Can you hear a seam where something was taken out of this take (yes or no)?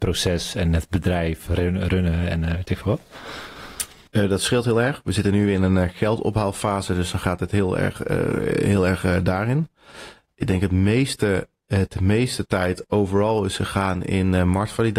no